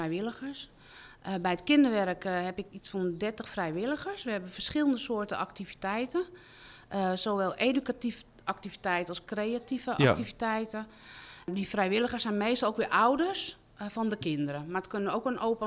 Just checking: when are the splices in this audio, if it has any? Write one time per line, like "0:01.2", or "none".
none